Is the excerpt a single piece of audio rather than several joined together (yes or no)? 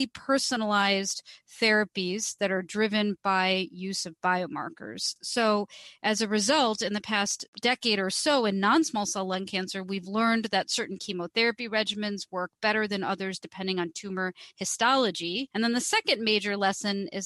yes